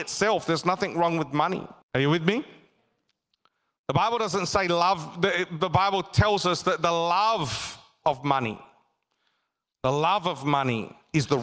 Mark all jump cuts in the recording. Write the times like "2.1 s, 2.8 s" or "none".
1.8 s